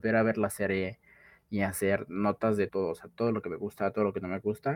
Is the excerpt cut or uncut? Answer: cut